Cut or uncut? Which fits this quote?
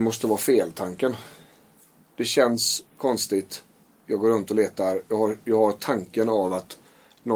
uncut